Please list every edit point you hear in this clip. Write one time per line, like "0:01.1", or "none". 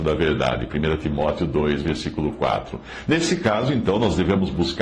none